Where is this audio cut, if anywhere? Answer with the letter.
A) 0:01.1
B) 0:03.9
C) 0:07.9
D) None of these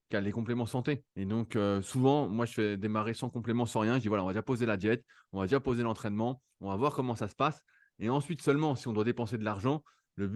A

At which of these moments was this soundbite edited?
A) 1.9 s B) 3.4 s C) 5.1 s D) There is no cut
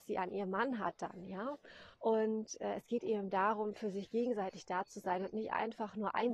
A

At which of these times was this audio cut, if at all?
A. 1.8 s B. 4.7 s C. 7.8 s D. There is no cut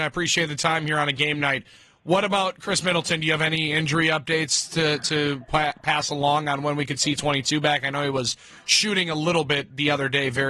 D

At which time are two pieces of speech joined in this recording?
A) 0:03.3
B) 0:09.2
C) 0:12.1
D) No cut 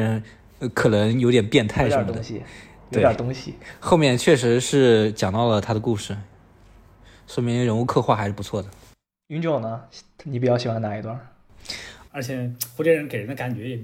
C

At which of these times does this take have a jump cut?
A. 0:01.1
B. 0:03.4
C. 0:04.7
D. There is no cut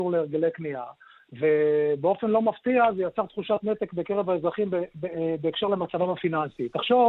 D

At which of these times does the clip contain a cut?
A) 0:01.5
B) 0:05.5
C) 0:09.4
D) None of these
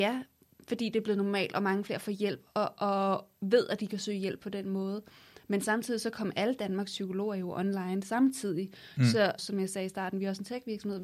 C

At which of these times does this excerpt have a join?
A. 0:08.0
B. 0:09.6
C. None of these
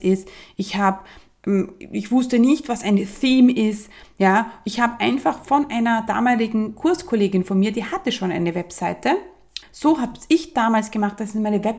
B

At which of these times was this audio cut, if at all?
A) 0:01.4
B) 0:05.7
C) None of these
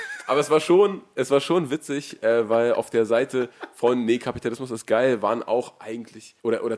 C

